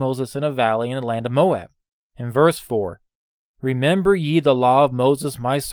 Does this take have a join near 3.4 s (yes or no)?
no